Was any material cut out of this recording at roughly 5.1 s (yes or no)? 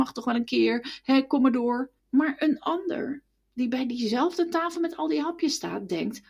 no